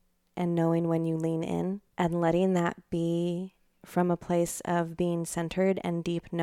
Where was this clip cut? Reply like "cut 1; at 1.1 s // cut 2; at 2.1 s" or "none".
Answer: cut 1; at 1.9 s